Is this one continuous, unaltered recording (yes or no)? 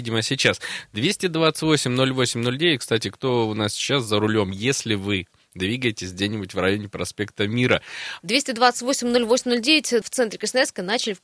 no